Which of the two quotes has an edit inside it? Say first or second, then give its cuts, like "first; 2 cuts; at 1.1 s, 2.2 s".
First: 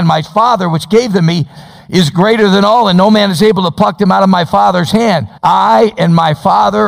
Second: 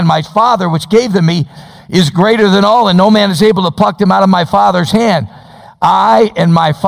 first; 1 cut; at 5.4 s